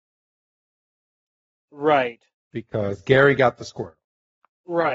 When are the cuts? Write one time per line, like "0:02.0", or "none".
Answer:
none